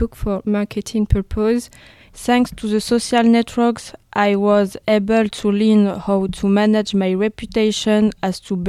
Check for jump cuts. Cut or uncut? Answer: cut